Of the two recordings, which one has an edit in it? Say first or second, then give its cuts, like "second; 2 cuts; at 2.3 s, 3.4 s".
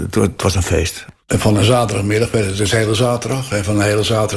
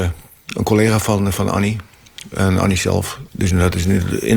second; 1 cut; at 3.3 s